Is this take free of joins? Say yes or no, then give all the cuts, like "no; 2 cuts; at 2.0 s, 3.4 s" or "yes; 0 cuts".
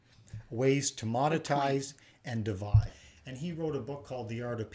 no; 1 cut; at 2.9 s